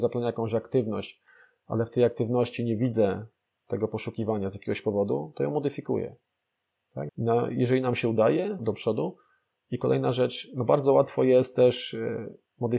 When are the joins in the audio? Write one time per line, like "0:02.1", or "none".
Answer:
0:07.1
0:08.6

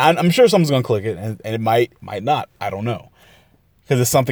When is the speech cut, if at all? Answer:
0:02.0

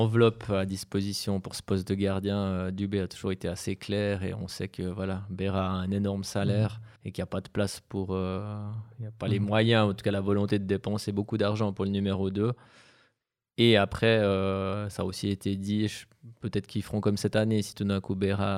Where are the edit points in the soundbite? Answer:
0:07.0

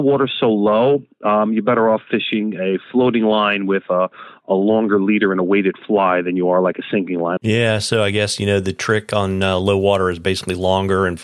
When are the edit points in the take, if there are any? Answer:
0:07.4

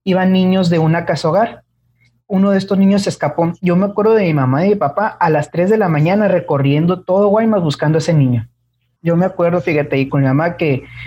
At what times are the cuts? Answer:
0:09.0
0:10.1

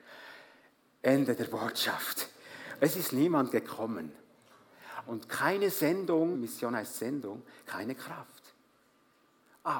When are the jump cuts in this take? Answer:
0:02.8
0:05.1
0:06.3

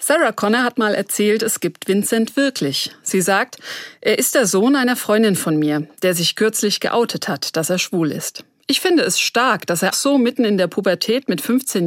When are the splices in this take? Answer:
0:09.9

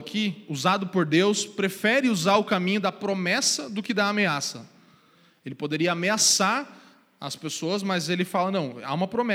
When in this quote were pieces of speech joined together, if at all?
none

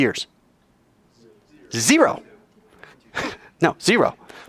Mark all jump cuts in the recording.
0:02.9

